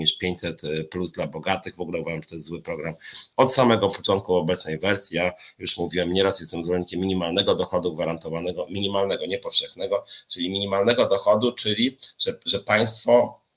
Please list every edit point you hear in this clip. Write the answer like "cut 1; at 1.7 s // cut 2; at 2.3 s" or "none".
none